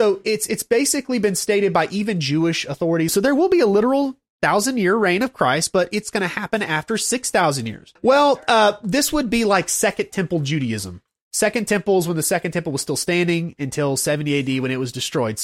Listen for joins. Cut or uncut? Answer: cut